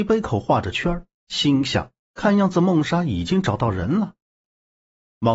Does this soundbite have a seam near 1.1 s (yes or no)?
no